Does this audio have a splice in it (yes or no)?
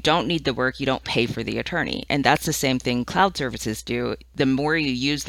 no